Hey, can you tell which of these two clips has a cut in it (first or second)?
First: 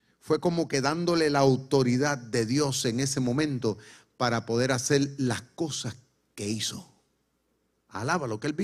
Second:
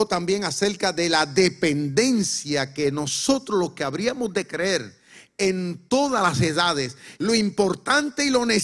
second